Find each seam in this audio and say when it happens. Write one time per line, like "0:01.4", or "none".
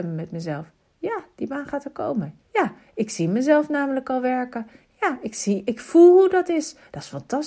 0:02.4
0:04.8

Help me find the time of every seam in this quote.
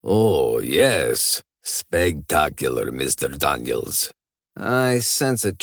0:04.4

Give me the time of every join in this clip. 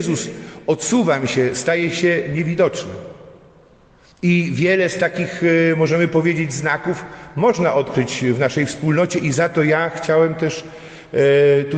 none

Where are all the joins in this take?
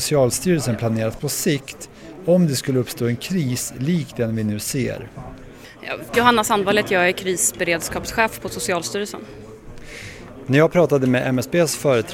0:06.1

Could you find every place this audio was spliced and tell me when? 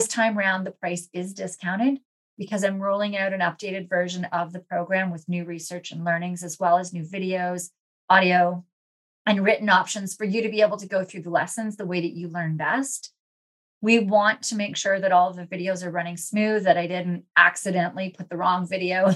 none

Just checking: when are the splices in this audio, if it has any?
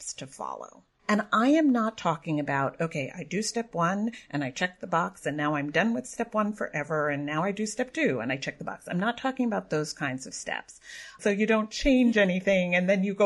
0:11.2

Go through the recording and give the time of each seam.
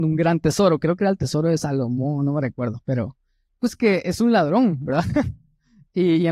none

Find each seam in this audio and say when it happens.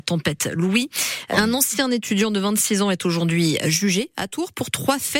0:01.3

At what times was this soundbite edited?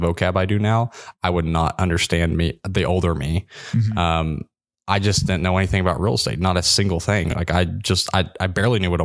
none

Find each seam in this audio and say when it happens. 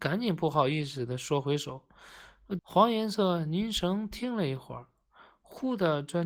0:02.6

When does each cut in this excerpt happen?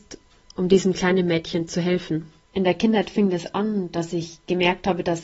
0:02.4

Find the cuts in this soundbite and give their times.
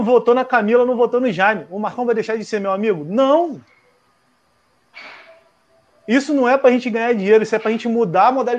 none

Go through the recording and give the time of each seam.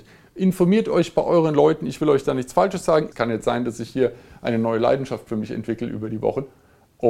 0:03.1

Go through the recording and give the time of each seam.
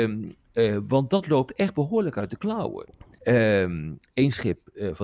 0:03.2

